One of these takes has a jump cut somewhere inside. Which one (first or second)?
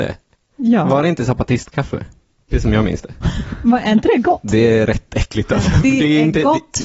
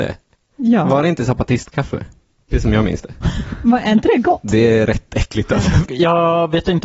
second